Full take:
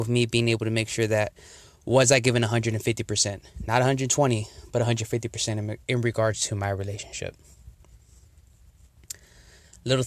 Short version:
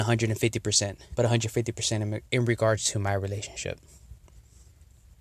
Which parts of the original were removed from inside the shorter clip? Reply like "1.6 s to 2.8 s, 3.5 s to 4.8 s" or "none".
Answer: 3.6 s to 4.7 s